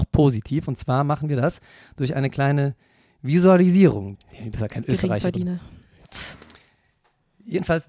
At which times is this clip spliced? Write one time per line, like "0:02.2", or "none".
0:04.1